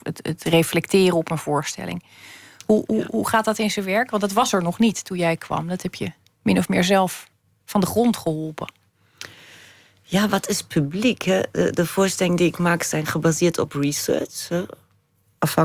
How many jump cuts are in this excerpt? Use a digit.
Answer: 0